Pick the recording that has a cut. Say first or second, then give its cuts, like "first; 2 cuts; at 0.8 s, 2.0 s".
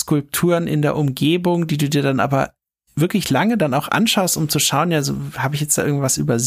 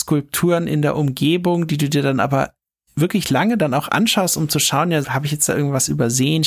second; 1 cut; at 5.0 s